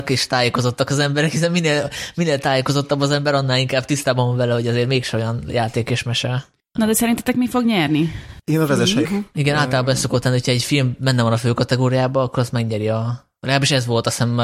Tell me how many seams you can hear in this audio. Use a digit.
1